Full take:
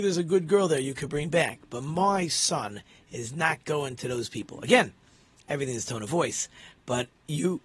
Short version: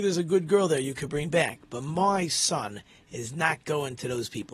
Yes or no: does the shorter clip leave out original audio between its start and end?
no